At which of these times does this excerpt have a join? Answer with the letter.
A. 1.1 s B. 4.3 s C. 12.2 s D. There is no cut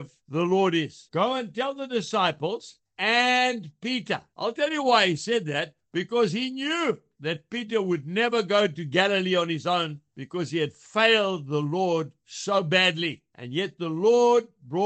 B